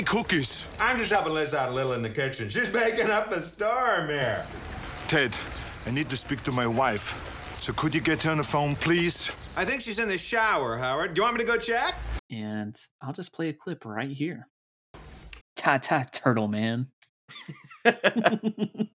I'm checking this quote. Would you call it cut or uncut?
cut